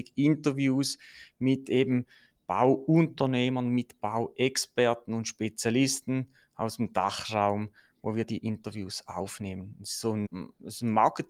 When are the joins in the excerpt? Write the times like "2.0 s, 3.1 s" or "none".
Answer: 10.2 s